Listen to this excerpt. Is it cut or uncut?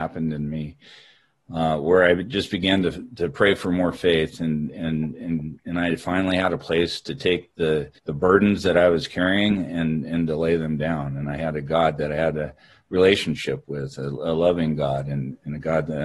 cut